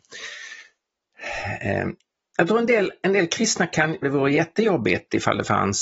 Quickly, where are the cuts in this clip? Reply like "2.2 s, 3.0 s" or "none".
4.0 s